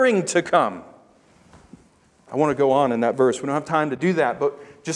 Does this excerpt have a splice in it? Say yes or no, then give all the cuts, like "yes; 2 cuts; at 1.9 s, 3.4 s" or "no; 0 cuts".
no; 0 cuts